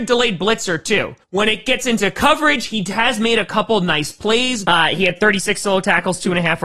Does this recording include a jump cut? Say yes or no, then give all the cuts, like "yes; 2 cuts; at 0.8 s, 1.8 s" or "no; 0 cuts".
yes; 2 cuts; at 1.2 s, 4.6 s